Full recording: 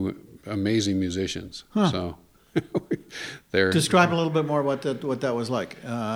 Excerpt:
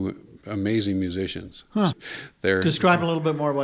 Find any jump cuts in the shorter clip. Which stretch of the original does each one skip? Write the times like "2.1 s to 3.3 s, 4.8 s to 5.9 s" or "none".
1.9 s to 3.0 s